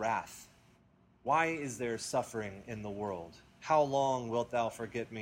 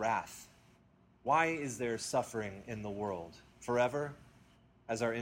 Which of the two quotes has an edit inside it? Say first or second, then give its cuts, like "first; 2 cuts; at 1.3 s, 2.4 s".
second; 1 cut; at 3.5 s